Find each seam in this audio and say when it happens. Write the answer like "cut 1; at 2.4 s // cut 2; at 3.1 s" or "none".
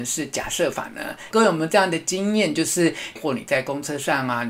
cut 1; at 1.3 s // cut 2; at 3.2 s